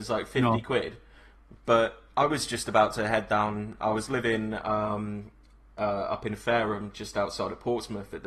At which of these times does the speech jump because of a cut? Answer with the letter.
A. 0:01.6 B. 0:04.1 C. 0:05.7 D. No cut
D